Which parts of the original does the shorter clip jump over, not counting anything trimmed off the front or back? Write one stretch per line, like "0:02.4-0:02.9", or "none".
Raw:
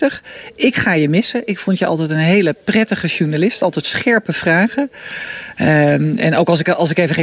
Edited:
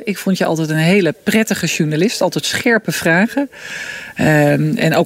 none